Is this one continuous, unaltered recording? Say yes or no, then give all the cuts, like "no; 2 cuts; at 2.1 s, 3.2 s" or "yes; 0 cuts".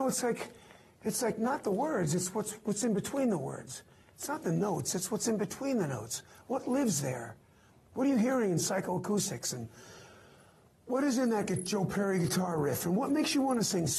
yes; 0 cuts